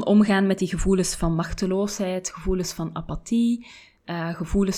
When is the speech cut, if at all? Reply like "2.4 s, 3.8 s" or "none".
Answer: none